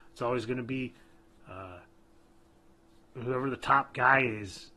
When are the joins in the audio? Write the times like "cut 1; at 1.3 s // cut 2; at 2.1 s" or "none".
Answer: none